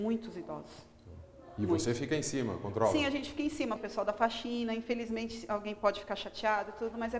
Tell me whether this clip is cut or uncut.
cut